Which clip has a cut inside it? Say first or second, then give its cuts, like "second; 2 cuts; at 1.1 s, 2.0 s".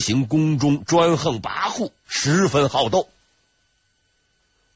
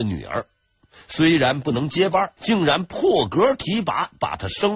second; 1 cut; at 2.4 s